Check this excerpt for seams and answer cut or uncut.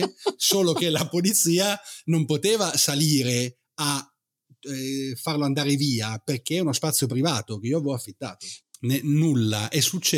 cut